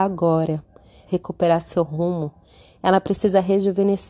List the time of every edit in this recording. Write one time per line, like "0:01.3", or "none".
0:01.1